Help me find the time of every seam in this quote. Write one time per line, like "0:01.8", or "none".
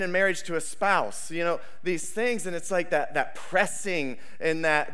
none